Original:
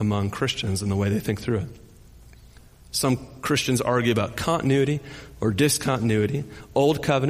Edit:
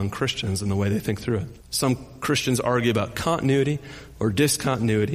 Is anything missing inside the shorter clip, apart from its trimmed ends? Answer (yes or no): yes